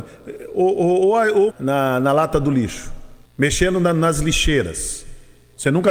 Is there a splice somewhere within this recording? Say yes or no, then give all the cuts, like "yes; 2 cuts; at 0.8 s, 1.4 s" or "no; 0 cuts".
yes; 2 cuts; at 1.5 s, 3.2 s